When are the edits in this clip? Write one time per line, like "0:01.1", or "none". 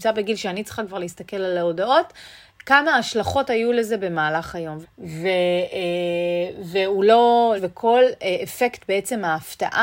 0:04.8
0:07.6